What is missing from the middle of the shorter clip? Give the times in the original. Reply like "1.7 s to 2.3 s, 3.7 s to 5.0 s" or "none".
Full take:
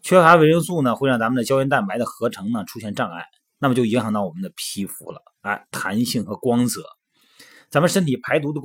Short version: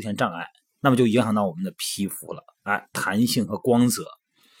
none